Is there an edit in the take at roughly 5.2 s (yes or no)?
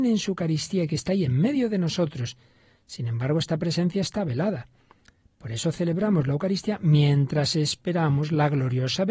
no